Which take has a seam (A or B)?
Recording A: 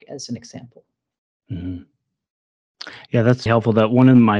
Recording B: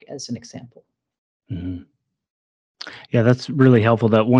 A